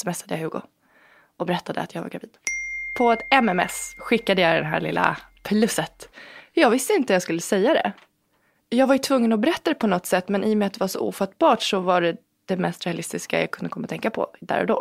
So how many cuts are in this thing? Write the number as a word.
zero